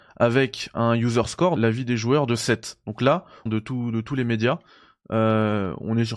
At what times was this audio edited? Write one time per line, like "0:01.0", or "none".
0:01.6
0:03.5